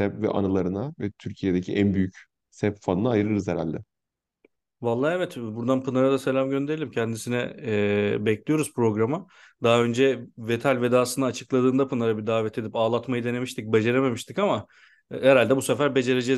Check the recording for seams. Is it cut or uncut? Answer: uncut